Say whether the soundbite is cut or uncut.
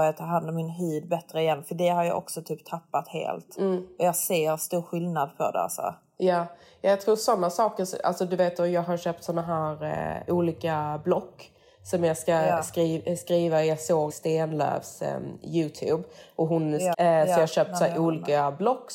cut